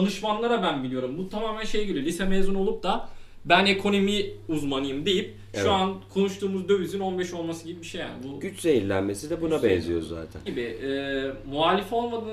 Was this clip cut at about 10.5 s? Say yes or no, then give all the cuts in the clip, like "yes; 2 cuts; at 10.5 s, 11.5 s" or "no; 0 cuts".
yes; 1 cut; at 10.5 s